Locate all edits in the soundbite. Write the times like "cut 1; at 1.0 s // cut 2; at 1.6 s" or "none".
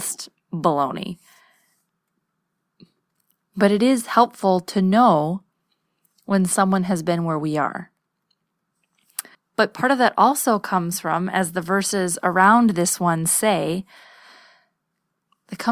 cut 1; at 9.3 s

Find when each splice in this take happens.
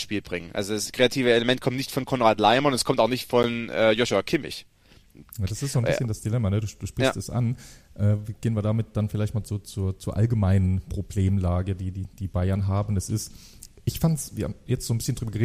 none

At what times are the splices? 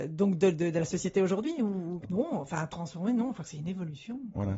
cut 1; at 2.0 s

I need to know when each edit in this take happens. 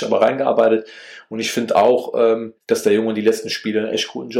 cut 1; at 2.6 s

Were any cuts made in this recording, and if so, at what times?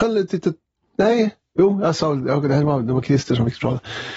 none

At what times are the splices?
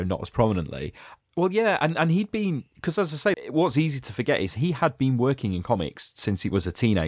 cut 1; at 1.2 s // cut 2; at 3.3 s

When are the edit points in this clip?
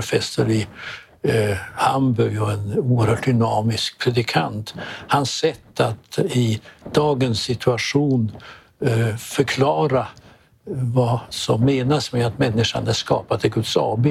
none

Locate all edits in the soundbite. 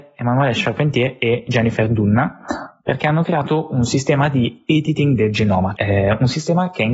cut 1; at 5.7 s

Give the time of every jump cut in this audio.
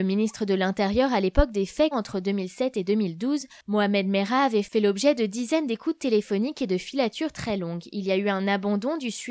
cut 1; at 1.9 s

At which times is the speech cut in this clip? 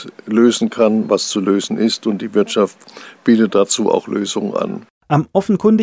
none

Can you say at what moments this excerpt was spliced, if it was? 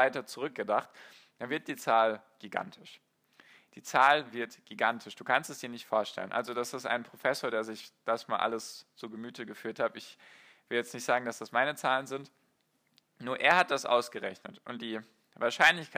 none

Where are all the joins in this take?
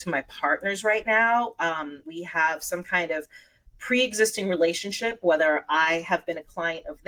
cut 1; at 2.0 s

